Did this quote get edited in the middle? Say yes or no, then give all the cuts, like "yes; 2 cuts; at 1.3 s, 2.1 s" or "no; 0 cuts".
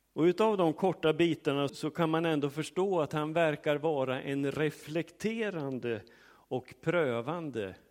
yes; 1 cut; at 1.7 s